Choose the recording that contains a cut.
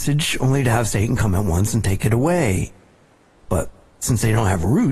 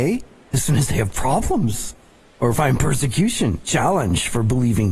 first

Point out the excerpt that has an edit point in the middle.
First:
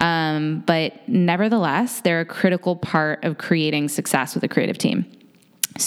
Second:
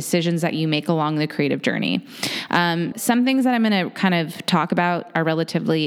second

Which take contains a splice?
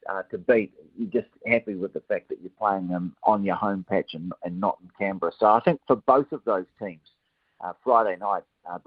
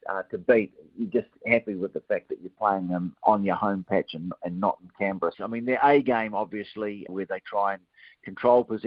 second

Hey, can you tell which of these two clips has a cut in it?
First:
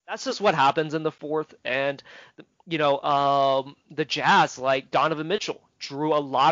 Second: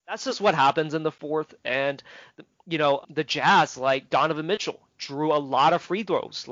second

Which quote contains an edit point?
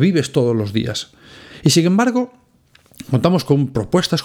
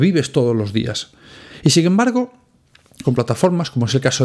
second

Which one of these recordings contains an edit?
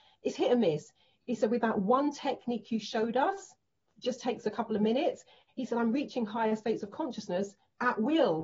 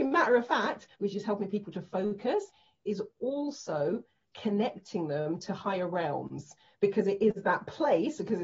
second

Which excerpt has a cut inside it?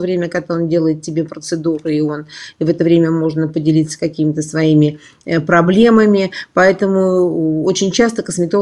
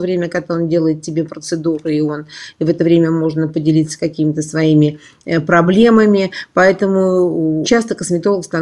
second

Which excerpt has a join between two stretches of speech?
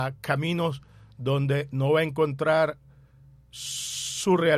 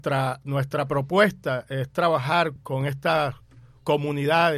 second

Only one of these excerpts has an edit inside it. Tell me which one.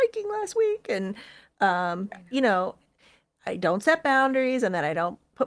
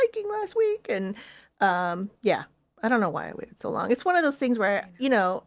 first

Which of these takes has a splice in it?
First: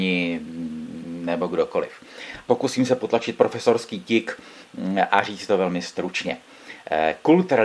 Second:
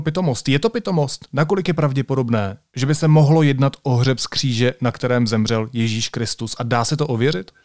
first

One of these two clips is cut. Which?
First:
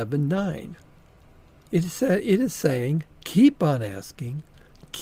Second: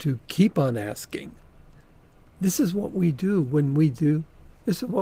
first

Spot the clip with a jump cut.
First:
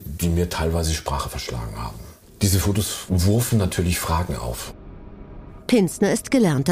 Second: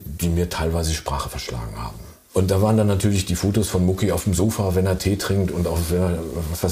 first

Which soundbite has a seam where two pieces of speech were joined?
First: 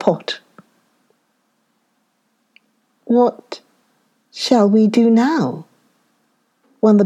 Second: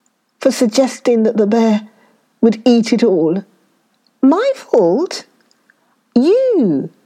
second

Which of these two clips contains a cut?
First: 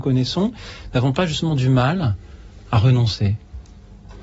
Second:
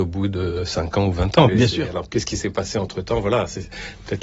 second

